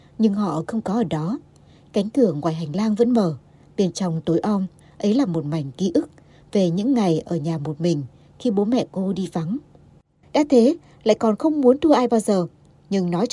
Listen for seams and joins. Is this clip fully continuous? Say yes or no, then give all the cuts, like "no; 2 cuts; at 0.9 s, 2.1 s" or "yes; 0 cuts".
no; 2 cuts; at 4.8 s, 10.2 s